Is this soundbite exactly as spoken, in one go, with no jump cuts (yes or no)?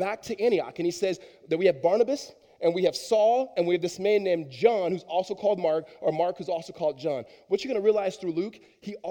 yes